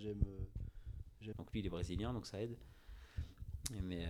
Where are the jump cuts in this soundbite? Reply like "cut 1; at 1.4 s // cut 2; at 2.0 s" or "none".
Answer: cut 1; at 1.3 s